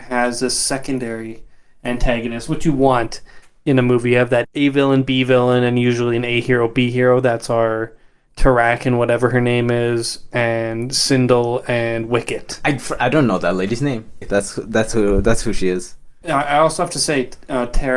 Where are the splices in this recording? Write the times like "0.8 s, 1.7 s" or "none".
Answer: 4.4 s, 14.2 s, 16.2 s

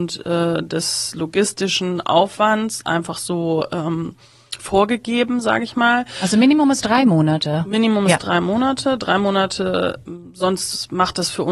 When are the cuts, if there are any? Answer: none

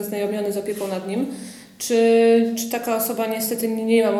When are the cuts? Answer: none

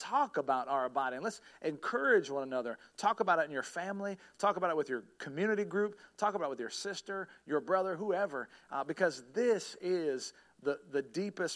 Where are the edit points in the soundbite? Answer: none

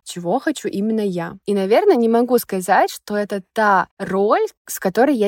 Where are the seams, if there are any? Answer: 1.4 s

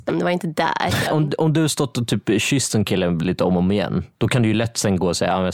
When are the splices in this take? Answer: 1.1 s

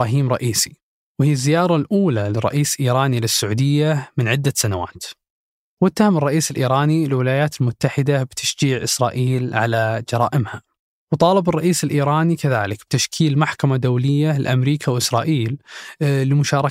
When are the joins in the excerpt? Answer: 5.6 s, 11.0 s

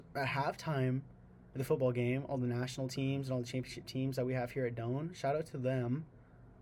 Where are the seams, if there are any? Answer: none

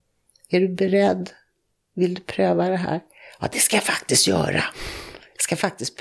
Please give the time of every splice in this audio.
none

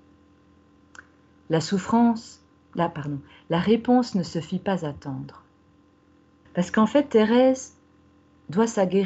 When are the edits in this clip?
6.5 s

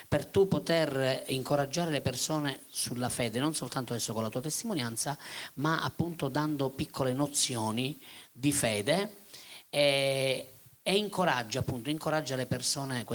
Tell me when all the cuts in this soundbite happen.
none

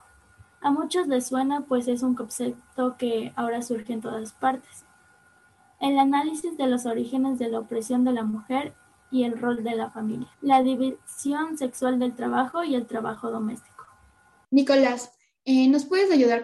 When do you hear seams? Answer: 10.3 s, 14.4 s

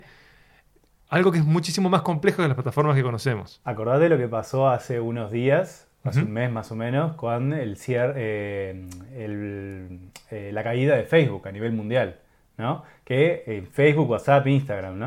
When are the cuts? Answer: none

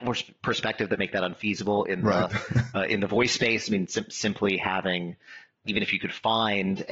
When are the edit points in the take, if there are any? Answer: none

